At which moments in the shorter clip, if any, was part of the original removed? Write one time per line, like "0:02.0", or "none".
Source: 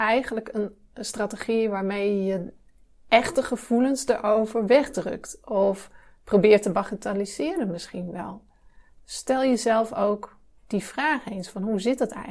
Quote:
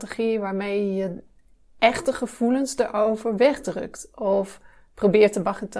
none